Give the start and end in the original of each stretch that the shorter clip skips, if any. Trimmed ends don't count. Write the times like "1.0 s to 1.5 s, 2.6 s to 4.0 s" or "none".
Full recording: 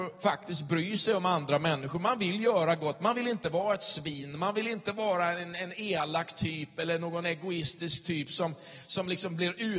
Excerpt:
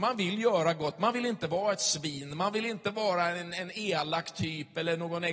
none